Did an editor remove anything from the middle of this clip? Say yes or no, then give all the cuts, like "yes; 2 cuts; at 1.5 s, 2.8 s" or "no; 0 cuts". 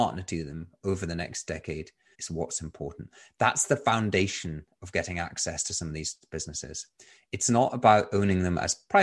yes; 1 cut; at 2.1 s